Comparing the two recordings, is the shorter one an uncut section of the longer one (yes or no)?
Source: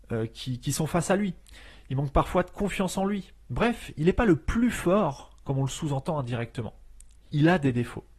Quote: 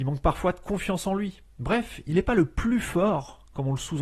yes